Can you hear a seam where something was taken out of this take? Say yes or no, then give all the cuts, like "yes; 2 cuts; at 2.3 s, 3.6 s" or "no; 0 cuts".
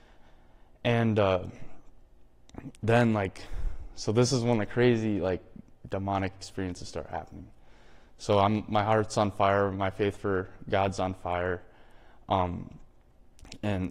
no; 0 cuts